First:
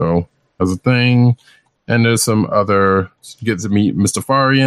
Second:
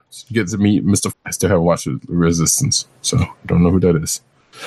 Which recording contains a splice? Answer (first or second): second